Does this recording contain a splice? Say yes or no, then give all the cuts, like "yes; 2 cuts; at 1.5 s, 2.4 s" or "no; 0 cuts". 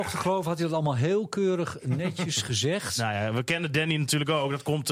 no; 0 cuts